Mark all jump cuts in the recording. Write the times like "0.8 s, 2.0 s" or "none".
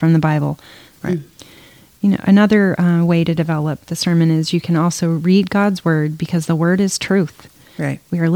0.9 s, 3.8 s